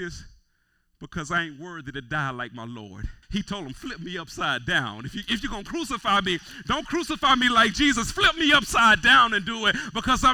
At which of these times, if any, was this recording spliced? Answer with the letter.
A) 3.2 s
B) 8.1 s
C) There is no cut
A